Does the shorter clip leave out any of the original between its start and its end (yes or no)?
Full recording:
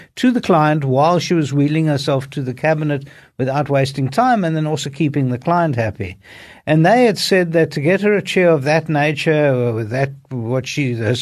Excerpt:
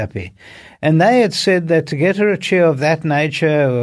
no